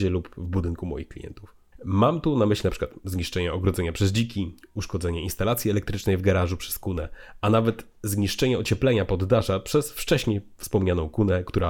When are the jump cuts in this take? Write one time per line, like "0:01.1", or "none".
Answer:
0:01.7